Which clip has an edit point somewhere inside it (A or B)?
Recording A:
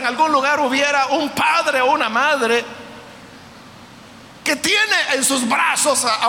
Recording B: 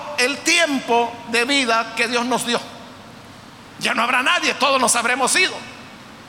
B